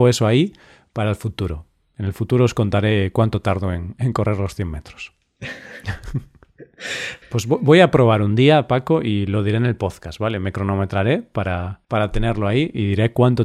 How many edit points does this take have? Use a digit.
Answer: 2